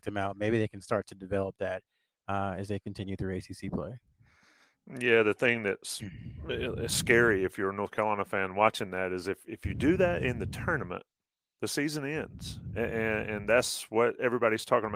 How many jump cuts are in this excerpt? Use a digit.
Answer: 0